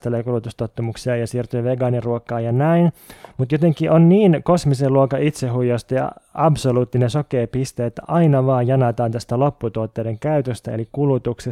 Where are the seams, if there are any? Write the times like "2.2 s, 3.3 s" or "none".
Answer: none